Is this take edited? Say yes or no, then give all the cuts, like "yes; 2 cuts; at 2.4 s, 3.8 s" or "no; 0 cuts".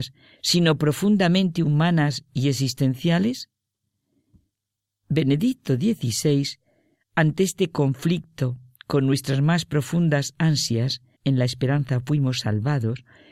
yes; 1 cut; at 11.1 s